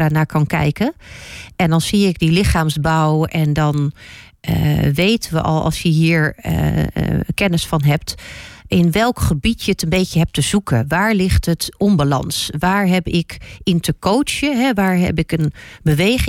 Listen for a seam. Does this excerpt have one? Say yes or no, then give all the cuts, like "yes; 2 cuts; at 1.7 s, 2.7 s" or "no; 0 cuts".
no; 0 cuts